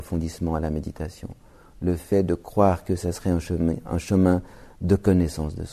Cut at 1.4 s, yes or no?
no